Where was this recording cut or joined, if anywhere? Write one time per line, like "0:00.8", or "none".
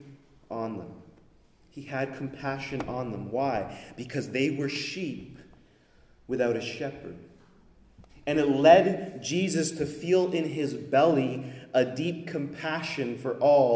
0:08.1